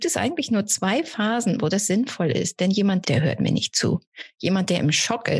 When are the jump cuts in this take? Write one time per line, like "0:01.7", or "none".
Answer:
0:03.0